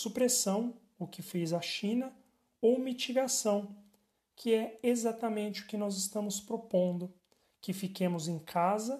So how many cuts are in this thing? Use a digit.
0